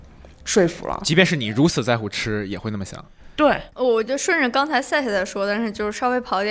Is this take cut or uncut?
cut